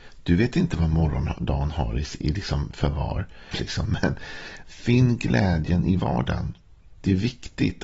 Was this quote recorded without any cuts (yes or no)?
no